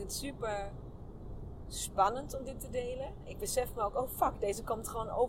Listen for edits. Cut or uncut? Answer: uncut